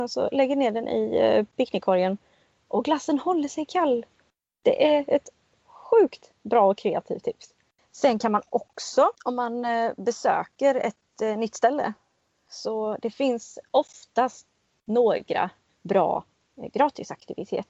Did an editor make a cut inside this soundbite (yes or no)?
yes